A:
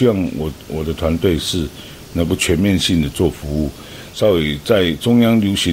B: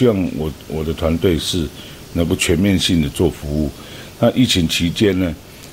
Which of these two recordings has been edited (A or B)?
A